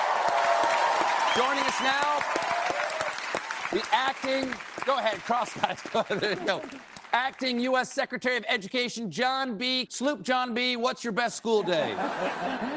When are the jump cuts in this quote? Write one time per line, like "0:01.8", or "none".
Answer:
0:09.9